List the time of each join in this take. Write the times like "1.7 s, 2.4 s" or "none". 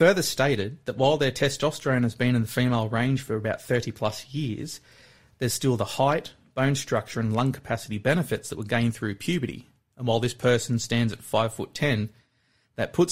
none